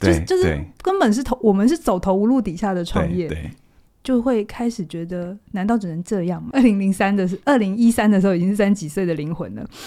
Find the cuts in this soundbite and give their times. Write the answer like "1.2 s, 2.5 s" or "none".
3.9 s, 6.5 s